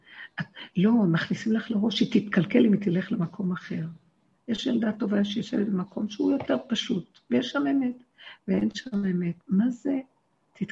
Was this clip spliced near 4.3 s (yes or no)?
yes